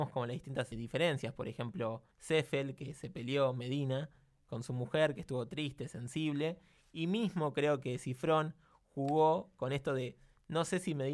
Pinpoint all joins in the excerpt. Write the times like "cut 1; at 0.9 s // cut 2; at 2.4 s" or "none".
cut 1; at 2.1 s